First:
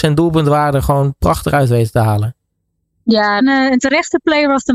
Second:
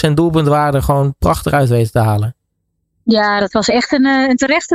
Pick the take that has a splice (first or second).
first